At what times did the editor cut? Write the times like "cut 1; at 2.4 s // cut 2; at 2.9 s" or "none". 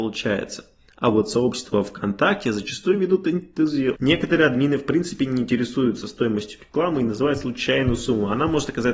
cut 1; at 4.0 s